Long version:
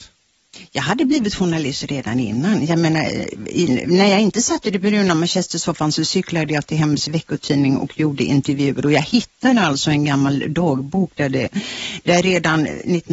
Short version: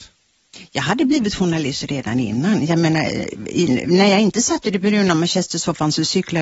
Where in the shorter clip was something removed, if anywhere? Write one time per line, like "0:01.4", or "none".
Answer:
none